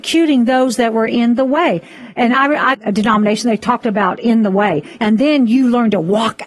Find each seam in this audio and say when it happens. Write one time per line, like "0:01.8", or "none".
0:02.7
0:05.0